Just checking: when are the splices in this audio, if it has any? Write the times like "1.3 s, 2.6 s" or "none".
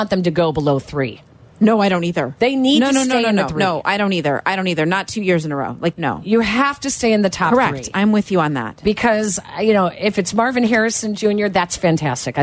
3.5 s, 5.9 s